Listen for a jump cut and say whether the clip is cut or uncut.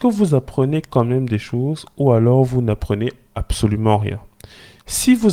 uncut